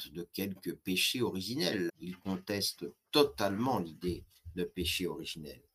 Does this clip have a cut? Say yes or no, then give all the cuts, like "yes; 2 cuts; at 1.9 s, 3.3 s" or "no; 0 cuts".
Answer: yes; 1 cut; at 1.9 s